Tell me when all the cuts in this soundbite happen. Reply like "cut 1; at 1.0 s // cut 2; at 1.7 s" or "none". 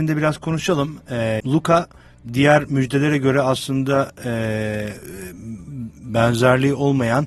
cut 1; at 1.4 s